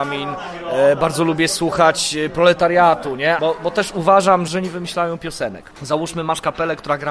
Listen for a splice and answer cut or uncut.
cut